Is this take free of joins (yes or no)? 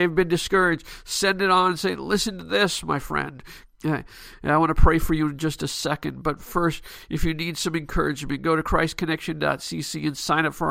no